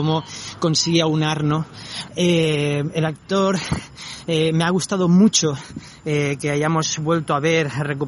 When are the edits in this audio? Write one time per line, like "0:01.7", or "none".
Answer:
0:02.1